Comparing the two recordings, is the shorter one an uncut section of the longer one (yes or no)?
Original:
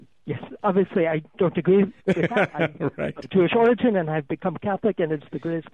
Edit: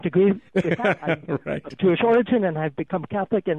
yes